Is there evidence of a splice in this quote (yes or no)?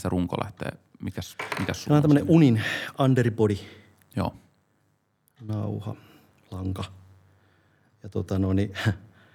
no